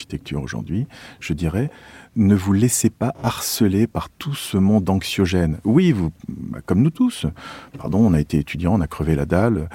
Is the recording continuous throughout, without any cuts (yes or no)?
yes